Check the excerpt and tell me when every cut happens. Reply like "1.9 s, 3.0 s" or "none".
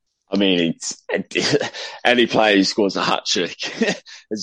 none